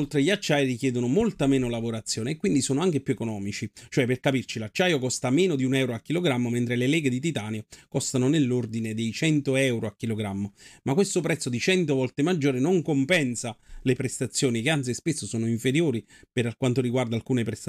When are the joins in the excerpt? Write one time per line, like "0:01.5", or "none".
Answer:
none

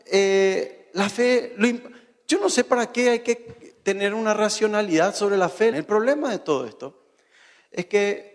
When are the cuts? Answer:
0:05.7

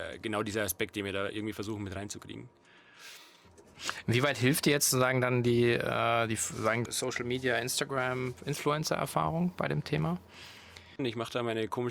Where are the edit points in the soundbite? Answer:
0:06.9
0:11.0

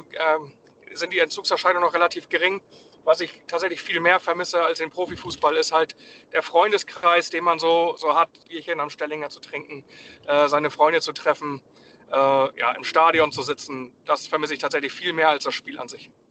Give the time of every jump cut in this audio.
0:08.4

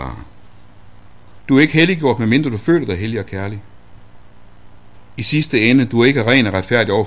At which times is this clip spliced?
0:01.4

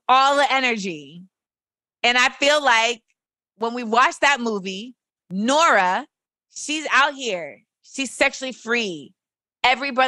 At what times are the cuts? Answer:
none

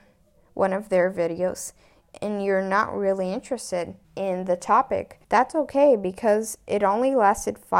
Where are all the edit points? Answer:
0:04.0
0:05.2

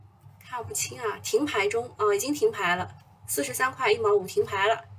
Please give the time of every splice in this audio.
none

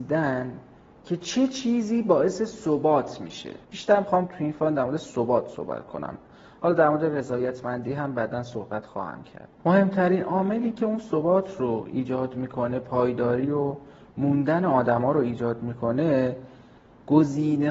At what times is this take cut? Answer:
0:03.6
0:09.6

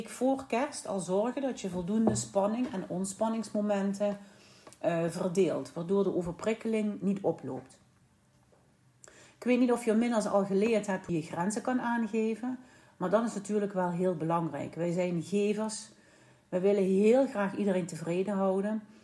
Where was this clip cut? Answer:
0:11.1

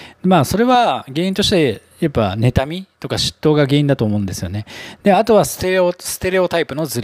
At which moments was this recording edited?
0:01.9

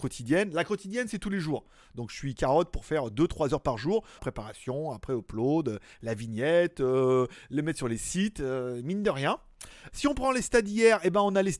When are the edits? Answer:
0:04.2
0:09.9

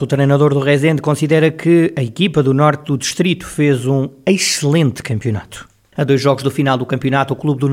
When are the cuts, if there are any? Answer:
0:05.9

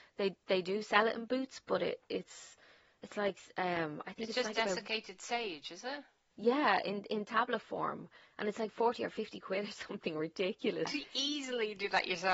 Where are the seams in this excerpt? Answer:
0:10.8

